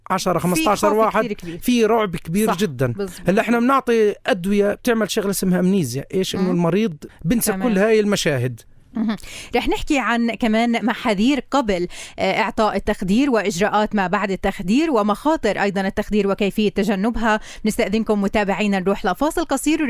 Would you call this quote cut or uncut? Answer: cut